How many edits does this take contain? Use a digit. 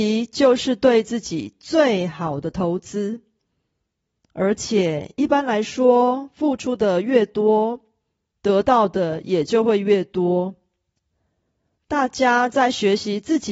1